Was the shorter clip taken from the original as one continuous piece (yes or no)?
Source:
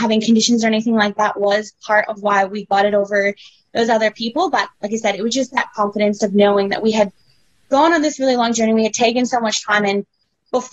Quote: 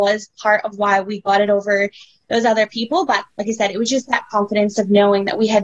yes